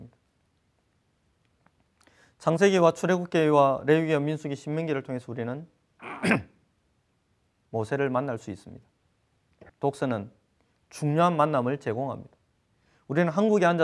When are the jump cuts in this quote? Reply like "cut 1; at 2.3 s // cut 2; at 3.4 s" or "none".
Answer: cut 1; at 9.7 s